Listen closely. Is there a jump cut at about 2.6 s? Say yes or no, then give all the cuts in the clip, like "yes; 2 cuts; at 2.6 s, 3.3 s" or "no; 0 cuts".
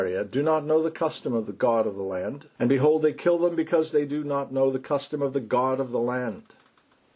yes; 1 cut; at 2.6 s